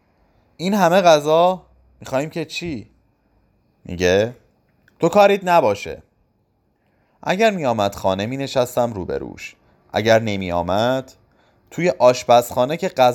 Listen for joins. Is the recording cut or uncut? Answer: uncut